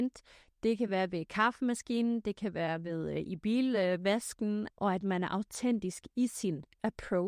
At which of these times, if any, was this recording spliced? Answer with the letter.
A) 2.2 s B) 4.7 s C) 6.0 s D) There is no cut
B